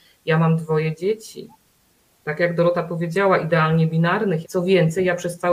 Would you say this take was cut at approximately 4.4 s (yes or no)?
yes